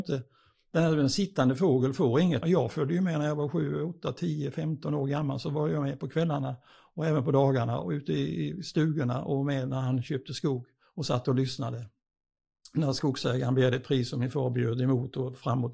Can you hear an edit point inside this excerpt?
yes; 1 cut; at 2.4 s

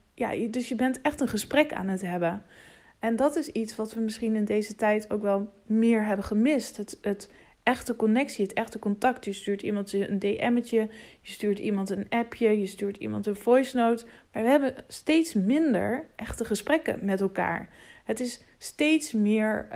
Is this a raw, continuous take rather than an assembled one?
yes; 0 cuts

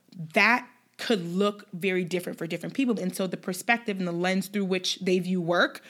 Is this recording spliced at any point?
yes; 1 cut; at 3.0 s

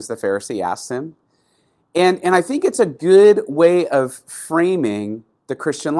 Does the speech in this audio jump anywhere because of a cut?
no; 0 cuts

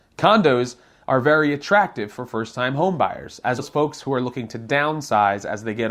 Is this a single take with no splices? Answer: no; 1 cut; at 3.6 s

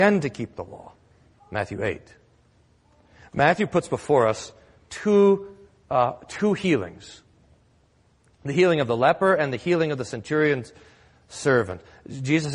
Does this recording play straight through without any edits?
no; 1 cut; at 1.4 s

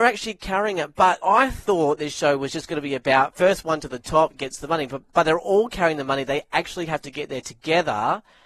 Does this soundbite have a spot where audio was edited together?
yes; 1 cut; at 1.2 s

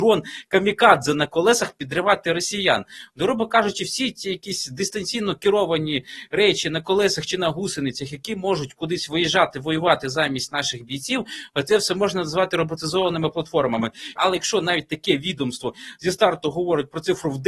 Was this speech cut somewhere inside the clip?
yes; 1 cut; at 14.2 s

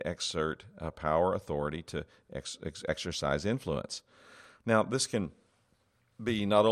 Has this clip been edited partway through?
no; 0 cuts

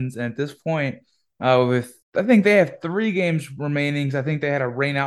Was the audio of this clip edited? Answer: yes; 1 cut; at 2.0 s

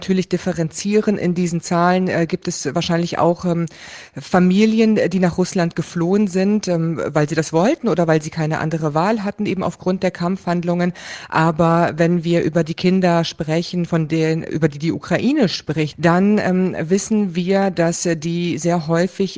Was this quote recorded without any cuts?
no; 1 cut; at 15.9 s

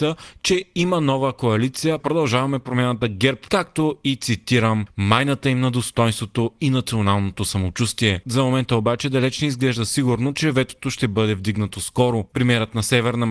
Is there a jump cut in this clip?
yes; 2 cuts; at 3.5 s, 8.2 s

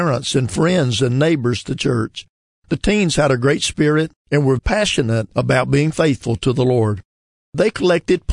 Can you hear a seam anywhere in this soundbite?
yes; 2 cuts; at 4.6 s, 7.3 s

